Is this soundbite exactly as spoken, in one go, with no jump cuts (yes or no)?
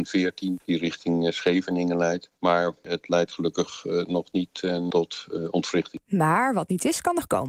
yes